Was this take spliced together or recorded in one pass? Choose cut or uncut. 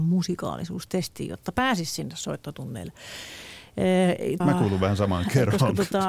cut